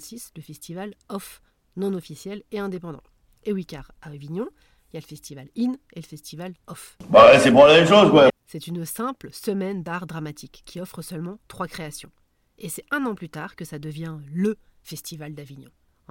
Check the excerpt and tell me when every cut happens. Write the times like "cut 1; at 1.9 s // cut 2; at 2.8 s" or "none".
cut 1; at 8.3 s